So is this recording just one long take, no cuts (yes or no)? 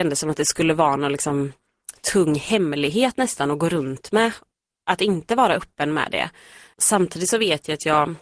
yes